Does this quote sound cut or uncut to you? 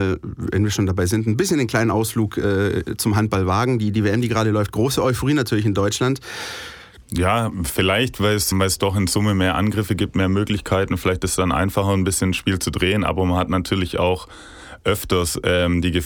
cut